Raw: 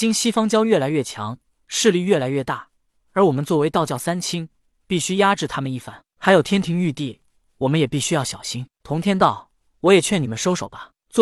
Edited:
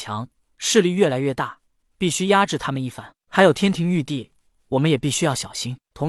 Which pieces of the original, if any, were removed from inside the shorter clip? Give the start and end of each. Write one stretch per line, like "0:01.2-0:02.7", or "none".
0:02.9-0:04.7